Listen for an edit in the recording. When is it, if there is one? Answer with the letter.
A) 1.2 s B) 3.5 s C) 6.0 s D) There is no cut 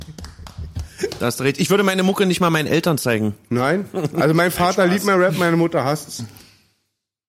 D